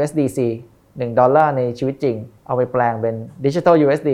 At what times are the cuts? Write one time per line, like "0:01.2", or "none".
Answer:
0:02.4